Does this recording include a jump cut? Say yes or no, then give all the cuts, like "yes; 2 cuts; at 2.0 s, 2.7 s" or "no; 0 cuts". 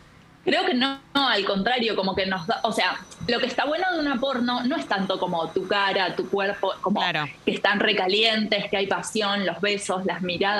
yes; 1 cut; at 6.8 s